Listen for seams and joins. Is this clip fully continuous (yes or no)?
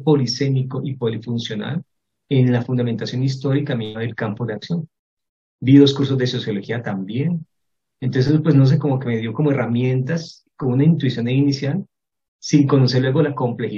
yes